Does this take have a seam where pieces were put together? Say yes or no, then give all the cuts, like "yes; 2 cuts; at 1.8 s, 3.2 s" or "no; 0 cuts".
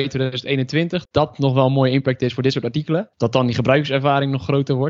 yes; 2 cuts; at 1.0 s, 3.1 s